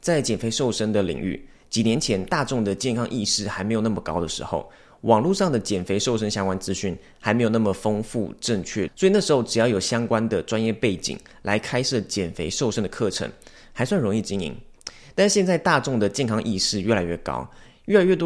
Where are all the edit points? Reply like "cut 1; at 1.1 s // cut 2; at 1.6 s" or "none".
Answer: cut 1; at 8.9 s